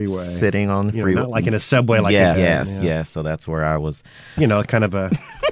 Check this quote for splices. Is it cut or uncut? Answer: cut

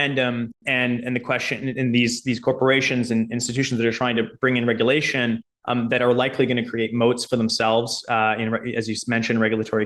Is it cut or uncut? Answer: uncut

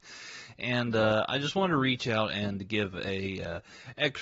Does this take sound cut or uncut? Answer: uncut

